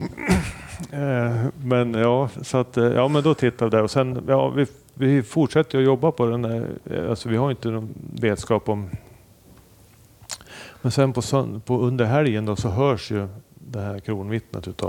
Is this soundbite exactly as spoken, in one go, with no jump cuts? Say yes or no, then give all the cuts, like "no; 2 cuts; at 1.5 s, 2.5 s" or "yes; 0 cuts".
yes; 0 cuts